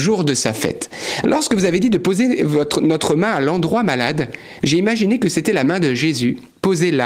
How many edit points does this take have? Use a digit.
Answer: 1